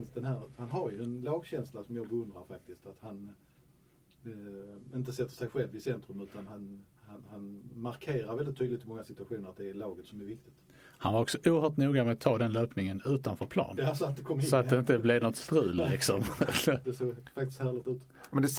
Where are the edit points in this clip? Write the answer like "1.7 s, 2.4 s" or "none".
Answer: 7.0 s, 16.8 s